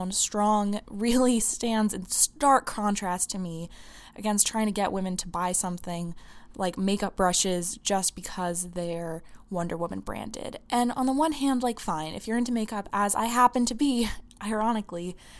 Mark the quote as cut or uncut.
uncut